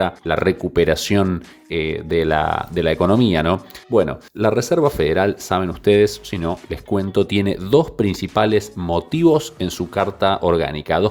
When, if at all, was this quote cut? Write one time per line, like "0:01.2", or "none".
none